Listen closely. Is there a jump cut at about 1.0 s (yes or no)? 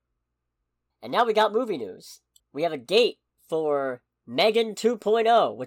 no